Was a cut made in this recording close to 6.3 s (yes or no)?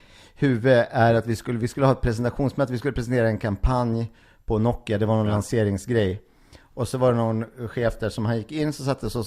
no